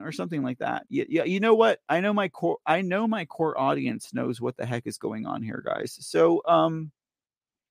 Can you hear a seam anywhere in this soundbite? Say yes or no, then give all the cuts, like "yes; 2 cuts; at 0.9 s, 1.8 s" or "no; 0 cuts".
no; 0 cuts